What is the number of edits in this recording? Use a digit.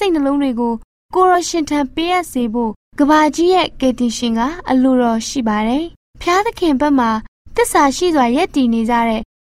0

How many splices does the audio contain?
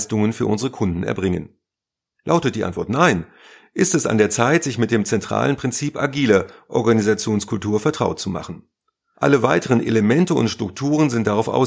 1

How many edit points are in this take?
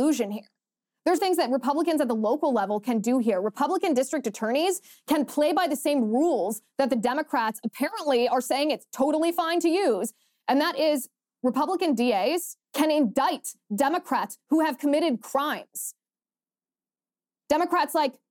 2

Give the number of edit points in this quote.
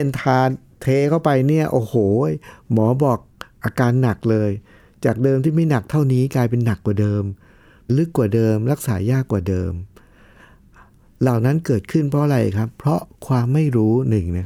1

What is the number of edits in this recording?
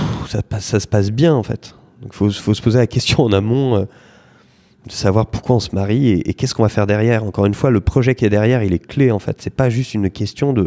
0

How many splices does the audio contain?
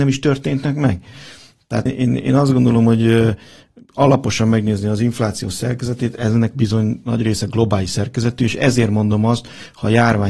1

